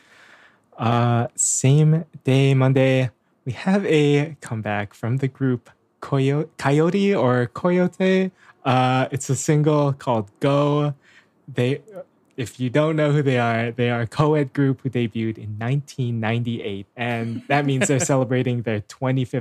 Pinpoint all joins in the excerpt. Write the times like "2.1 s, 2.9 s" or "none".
16.9 s